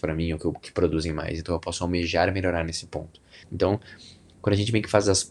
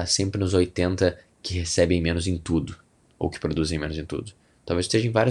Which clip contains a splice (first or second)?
first